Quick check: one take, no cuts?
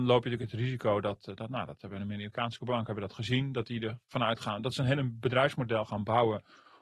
yes; 0 cuts

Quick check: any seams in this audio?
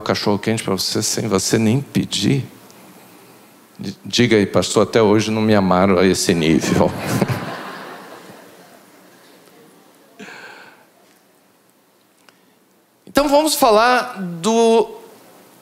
no; 0 cuts

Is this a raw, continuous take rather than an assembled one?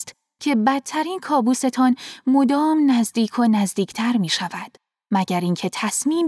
yes; 0 cuts

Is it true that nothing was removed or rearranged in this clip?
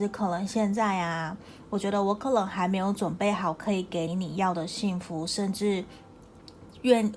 no; 1 cut; at 4.1 s

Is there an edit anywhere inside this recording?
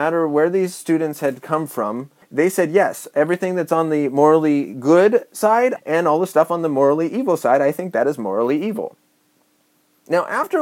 yes; 2 cuts; at 2.2 s, 5.8 s

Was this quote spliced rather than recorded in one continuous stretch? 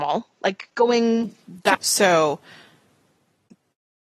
yes; 1 cut; at 1.7 s

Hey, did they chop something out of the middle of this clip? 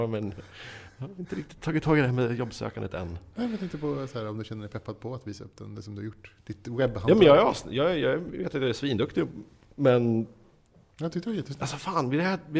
no; 0 cuts

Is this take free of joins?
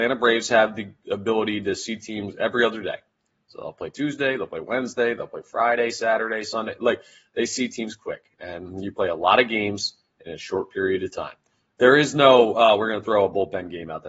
no; 1 cut; at 11.7 s

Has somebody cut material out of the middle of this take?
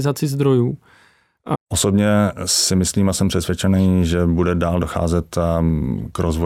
yes; 1 cut; at 1.5 s

